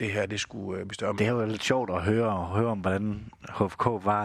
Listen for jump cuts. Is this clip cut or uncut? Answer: cut